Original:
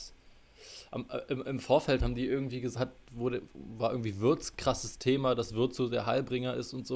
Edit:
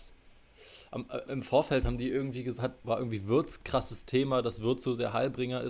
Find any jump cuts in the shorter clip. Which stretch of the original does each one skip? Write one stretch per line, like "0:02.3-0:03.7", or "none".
0:01.3-0:01.4
0:03.0-0:03.8